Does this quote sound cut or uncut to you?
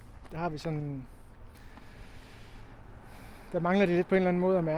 uncut